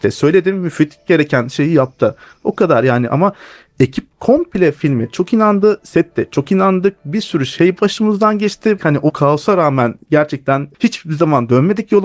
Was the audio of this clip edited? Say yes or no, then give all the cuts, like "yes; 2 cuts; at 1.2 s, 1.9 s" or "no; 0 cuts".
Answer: yes; 1 cut; at 8.8 s